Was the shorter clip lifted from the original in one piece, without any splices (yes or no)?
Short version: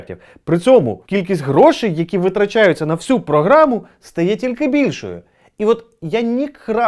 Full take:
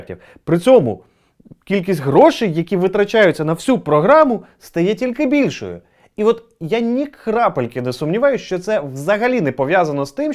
no